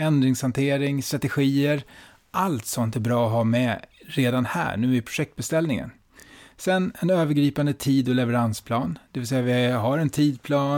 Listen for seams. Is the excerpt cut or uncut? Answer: uncut